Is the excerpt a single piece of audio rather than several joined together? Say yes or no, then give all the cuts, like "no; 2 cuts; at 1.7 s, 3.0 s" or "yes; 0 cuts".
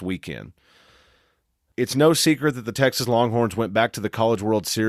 yes; 0 cuts